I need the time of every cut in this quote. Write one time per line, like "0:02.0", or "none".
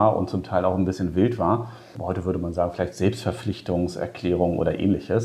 0:01.9

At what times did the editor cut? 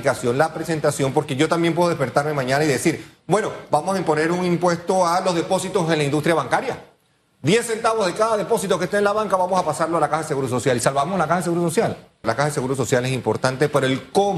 0:12.2

